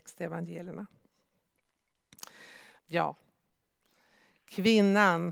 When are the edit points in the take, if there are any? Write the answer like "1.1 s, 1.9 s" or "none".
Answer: 2.8 s